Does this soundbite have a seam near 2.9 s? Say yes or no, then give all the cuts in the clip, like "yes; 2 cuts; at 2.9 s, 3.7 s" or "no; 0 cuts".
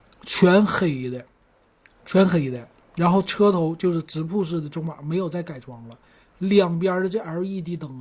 no; 0 cuts